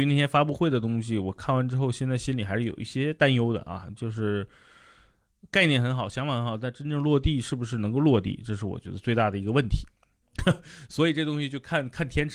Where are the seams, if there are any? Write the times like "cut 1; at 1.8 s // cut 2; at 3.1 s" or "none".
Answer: cut 1; at 10.2 s